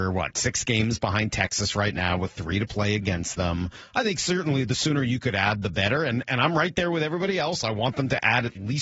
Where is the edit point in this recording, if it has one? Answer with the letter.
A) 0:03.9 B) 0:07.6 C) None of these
C